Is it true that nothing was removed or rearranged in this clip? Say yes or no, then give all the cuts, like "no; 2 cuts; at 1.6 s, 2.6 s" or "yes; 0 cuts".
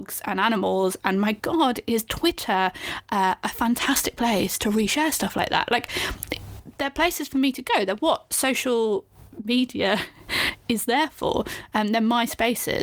yes; 0 cuts